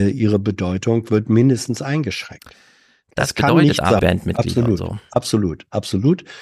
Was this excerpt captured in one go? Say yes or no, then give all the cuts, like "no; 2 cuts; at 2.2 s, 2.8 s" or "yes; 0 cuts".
no; 1 cut; at 4.0 s